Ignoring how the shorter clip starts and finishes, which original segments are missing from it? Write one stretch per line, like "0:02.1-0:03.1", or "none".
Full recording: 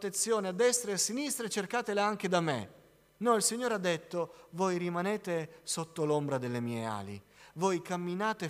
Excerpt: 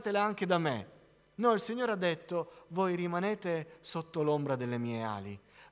none